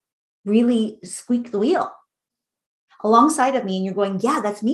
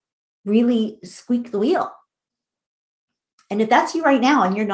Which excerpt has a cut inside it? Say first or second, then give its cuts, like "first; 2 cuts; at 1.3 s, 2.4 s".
first; 1 cut; at 2.9 s